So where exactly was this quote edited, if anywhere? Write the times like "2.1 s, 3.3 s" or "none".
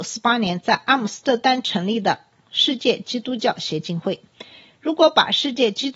none